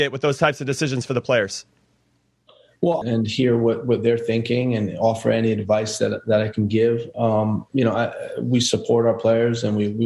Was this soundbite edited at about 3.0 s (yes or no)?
yes